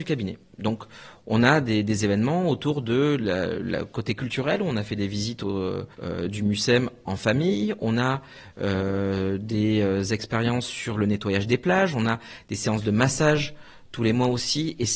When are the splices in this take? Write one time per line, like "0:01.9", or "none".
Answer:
0:05.9